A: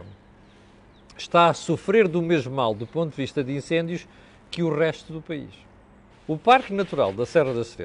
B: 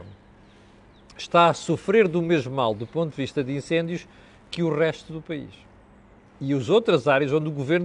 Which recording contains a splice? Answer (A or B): A